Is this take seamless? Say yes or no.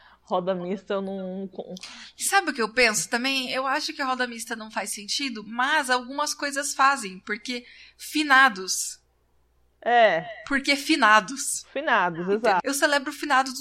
no